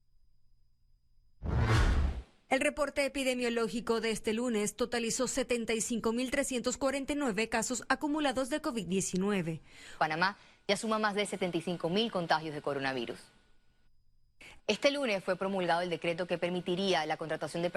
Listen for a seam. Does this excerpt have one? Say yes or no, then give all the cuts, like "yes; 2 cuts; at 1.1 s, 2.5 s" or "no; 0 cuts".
yes; 3 cuts; at 2.5 s, 10.0 s, 14.6 s